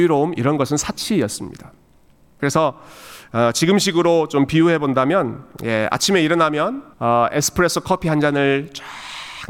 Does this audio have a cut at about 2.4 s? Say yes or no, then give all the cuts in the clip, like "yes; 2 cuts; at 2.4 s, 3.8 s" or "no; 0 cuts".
yes; 2 cuts; at 2.4 s, 6.9 s